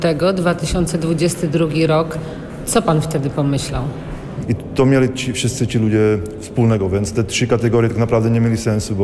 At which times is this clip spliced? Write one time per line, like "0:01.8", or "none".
0:04.4